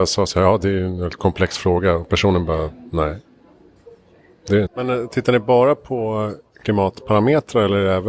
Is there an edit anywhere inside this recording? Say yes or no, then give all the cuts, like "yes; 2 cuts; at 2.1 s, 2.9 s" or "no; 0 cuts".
yes; 1 cut; at 4.7 s